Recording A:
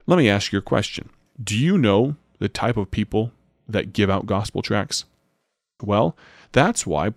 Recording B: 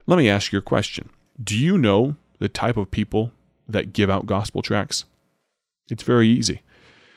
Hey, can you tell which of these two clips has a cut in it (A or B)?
A